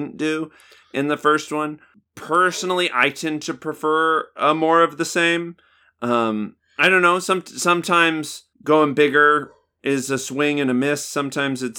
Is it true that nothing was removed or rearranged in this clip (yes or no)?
no